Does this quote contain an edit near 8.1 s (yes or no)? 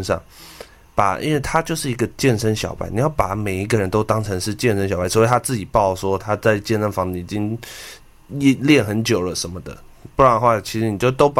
no